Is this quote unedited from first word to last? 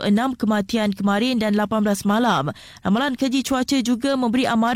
yes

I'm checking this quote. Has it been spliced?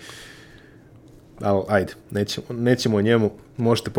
no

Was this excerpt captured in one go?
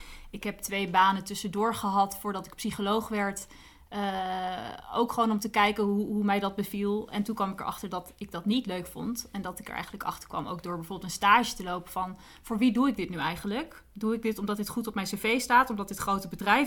yes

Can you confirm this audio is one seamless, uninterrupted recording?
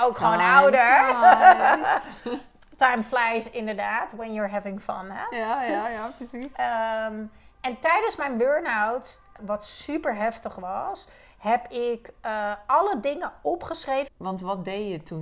no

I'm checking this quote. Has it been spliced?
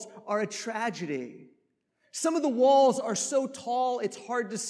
no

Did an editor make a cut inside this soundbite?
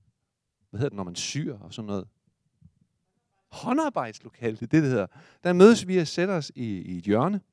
no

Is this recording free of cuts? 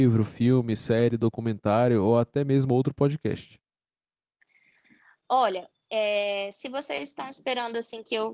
yes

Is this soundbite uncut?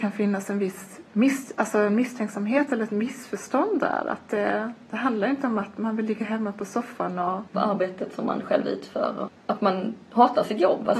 no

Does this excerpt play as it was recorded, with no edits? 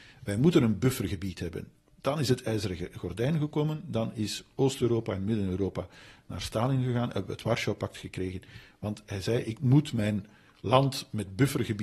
yes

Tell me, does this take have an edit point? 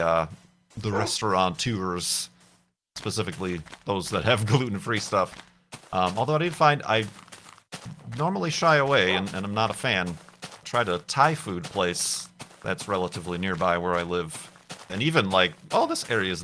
yes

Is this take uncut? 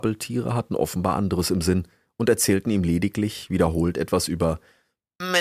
yes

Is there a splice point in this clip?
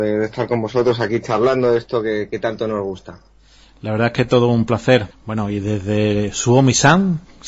yes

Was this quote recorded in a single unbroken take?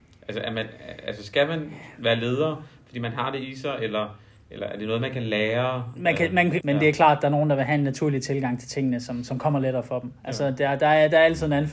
no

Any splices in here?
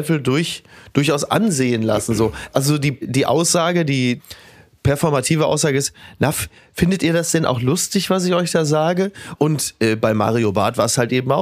yes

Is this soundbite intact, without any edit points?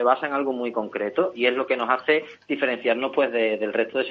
yes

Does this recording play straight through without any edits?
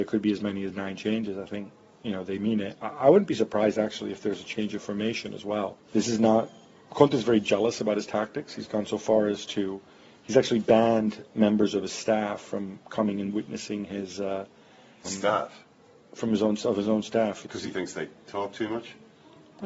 no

